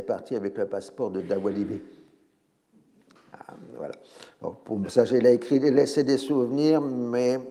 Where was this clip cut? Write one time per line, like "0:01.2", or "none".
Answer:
0:03.2